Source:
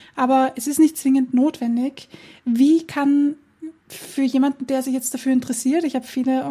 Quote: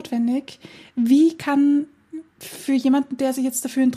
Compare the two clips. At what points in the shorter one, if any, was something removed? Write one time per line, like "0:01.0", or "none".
none